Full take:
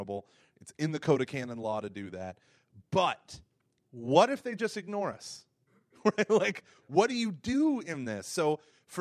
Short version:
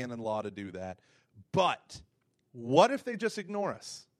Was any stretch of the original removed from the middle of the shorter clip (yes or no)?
no